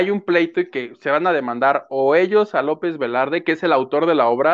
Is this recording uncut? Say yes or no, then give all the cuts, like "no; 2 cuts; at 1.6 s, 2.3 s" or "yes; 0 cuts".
yes; 0 cuts